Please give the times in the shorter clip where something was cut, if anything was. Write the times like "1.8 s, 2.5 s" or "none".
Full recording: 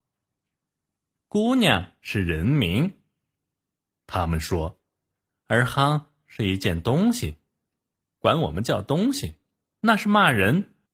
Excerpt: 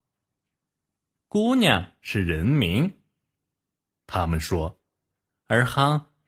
none

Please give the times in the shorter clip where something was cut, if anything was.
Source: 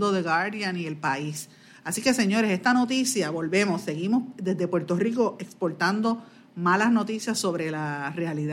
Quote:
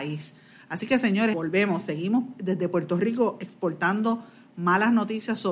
1.3 s

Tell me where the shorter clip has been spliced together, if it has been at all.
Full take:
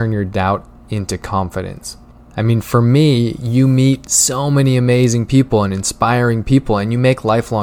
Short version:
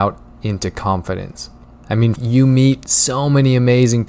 2.2 s

